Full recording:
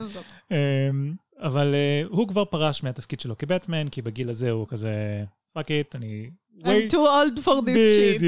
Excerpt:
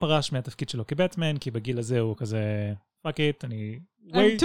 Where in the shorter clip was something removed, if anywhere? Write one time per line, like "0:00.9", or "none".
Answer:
none